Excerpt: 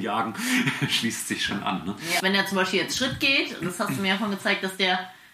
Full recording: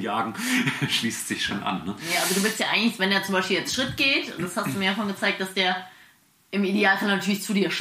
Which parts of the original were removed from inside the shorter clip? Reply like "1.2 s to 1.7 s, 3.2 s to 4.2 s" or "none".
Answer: 2.2 s to 3.0 s